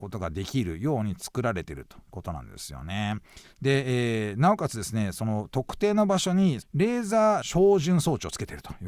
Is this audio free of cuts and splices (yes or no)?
no